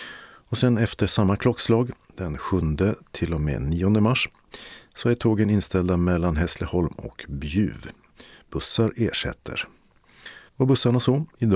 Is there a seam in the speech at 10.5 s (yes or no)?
yes